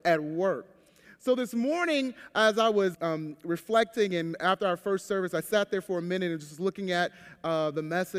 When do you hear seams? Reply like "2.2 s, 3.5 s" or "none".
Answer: 2.9 s